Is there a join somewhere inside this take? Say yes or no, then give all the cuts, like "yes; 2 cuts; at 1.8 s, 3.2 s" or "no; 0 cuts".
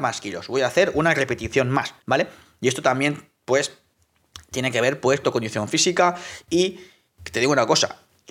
yes; 2 cuts; at 2.0 s, 5.2 s